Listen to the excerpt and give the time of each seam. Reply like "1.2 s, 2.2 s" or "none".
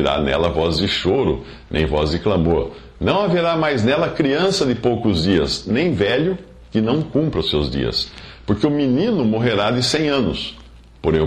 none